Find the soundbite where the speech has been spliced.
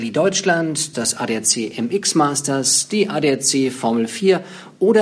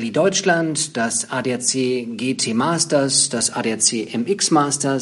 first; 1 cut; at 0.9 s

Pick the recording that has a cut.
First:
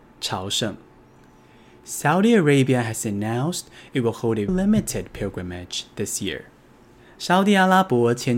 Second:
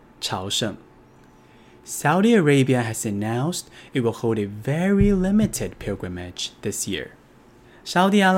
first; 1 cut; at 4.5 s

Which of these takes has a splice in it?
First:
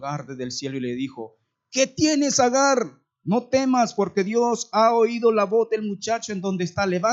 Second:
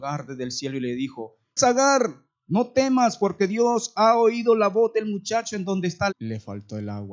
second; 2 cuts; at 1.6 s, 6.1 s

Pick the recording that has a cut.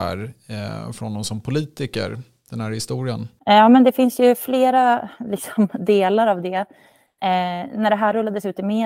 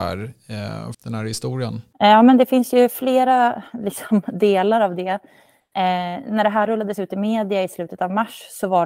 second; 1 cut; at 0.9 s

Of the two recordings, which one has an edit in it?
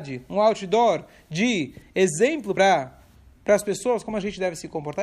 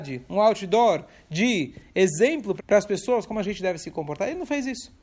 second; 1 cut; at 2.6 s

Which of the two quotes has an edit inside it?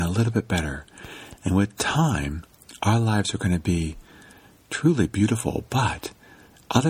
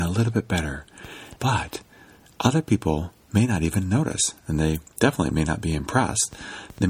second; 1 cut; at 1.4 s

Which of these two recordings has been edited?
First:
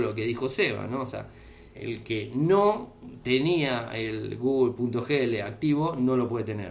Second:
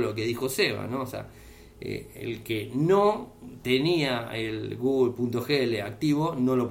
first; 1 cut; at 1.7 s

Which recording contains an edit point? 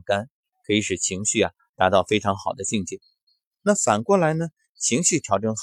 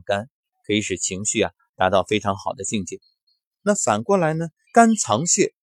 second; 1 cut; at 4.7 s

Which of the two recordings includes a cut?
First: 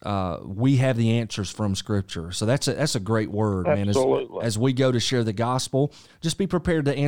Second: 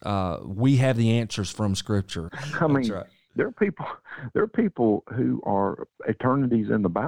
second; 1 cut; at 2.3 s

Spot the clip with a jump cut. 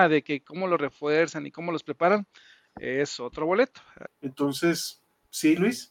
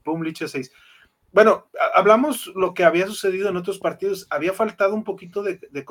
first; 1 cut; at 4.1 s

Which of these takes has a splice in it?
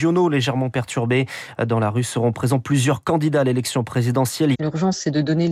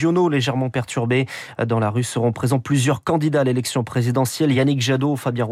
first; 1 cut; at 4.5 s

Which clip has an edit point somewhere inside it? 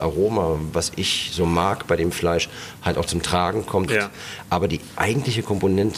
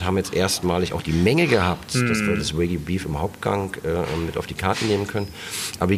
first; 1 cut; at 3.9 s

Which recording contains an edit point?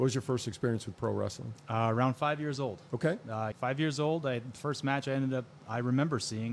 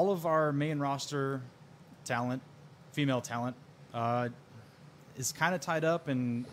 first; 1 cut; at 3.5 s

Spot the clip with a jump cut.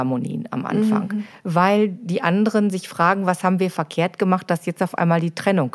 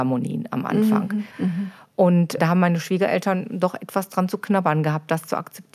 second; 2 cuts; at 1.3 s, 2.4 s

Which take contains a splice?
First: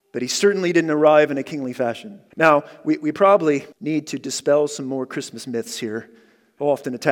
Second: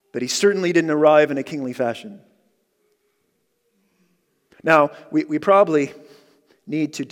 first; 2 cuts; at 2.3 s, 3.7 s

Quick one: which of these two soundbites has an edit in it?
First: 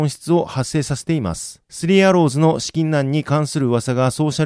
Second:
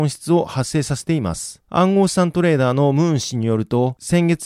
first; 1 cut; at 1.6 s

